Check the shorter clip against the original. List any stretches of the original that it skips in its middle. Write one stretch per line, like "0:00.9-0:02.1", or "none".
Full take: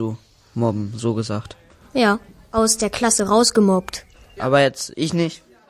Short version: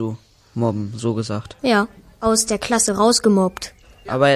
0:01.6-0:01.9